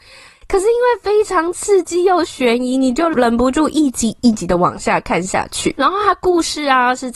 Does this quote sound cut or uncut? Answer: uncut